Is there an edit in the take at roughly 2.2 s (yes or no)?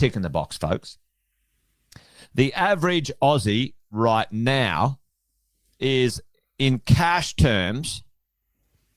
no